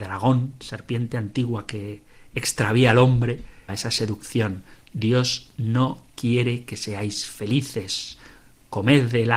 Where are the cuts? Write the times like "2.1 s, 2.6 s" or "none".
3.7 s